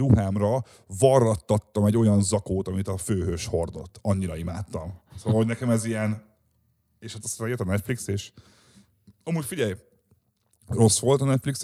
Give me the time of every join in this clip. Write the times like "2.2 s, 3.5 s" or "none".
none